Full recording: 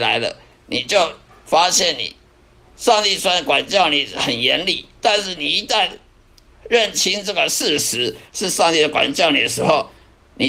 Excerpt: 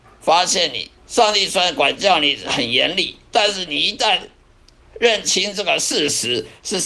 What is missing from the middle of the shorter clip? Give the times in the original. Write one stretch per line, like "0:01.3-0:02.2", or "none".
0:02.2-0:02.7